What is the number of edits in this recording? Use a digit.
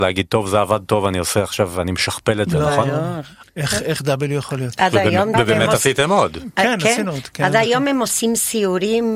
2